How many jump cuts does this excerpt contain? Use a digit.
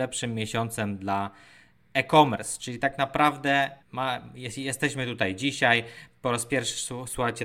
2